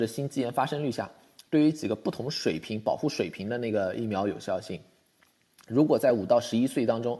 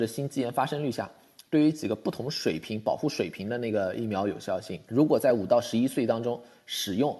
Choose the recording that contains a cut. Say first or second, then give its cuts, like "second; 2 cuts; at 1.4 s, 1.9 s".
second; 1 cut; at 4.8 s